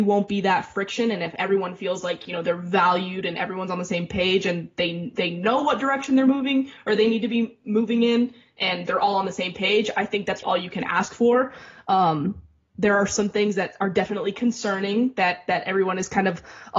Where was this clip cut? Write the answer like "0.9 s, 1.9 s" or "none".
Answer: 10.4 s